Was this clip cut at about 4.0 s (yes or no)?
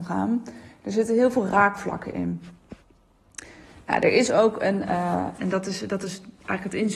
no